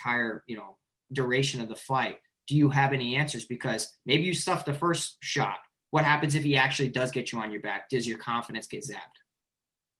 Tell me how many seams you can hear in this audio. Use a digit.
0